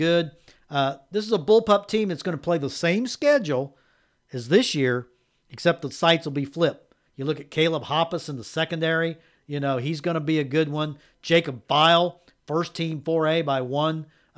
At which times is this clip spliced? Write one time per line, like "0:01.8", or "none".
0:07.1